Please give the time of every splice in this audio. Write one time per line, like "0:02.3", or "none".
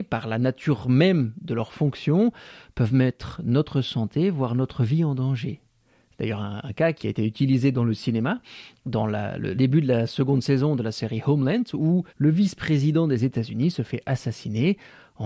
0:07.0
0:09.5
0:12.1